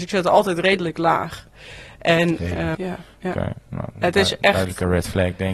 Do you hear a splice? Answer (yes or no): yes